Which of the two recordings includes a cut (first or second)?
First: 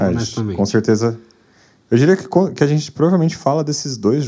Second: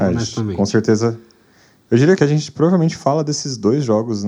second